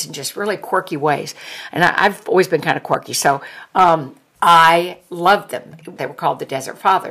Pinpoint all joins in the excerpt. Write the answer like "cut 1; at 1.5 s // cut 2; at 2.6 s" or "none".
cut 1; at 6.0 s